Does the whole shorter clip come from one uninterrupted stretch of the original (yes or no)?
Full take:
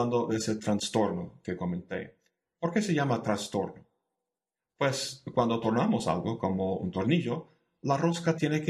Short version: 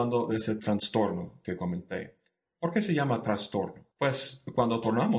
no